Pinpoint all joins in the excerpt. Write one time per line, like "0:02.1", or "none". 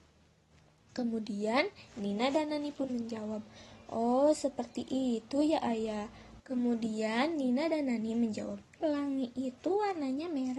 0:06.4
0:08.8